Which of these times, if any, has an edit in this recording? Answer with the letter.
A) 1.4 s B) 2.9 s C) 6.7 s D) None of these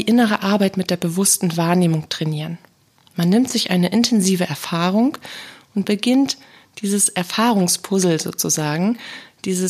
D